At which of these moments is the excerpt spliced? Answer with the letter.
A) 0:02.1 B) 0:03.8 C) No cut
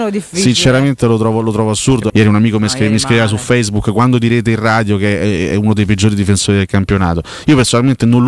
A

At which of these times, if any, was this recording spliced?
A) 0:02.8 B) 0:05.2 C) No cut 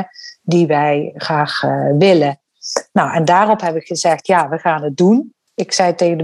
C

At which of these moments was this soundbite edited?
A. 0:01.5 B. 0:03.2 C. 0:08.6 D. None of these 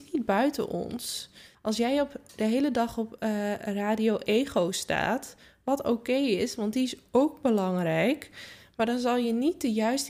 A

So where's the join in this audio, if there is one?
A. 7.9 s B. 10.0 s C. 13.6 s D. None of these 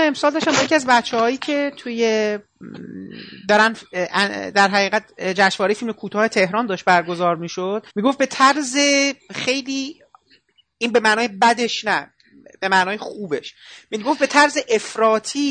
A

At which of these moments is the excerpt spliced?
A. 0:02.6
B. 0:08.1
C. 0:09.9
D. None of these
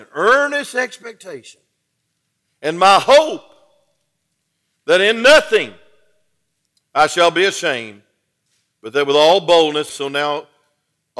C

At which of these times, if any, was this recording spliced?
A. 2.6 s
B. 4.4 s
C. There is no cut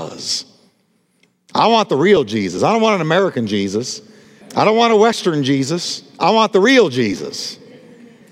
B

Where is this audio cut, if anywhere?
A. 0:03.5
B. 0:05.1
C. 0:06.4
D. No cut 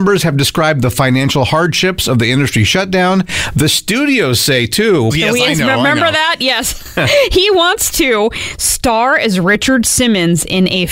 B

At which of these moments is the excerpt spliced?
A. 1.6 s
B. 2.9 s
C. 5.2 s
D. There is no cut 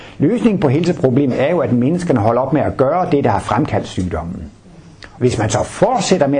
C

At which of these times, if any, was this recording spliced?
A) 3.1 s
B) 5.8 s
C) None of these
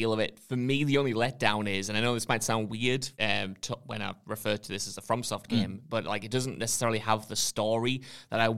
A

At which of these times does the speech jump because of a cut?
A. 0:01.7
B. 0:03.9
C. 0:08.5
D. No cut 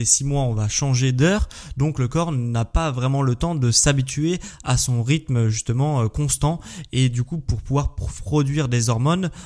D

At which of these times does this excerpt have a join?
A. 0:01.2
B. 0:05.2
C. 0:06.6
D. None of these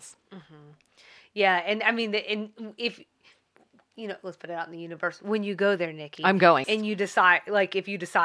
C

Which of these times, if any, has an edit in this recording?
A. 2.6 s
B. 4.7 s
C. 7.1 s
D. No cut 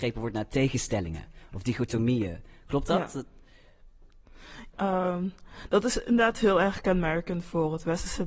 B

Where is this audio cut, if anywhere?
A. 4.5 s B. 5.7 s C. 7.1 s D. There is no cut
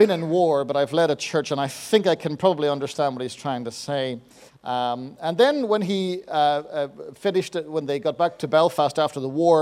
A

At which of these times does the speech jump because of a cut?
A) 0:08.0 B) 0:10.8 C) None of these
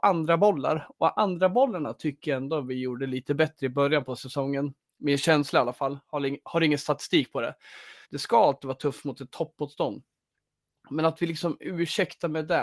A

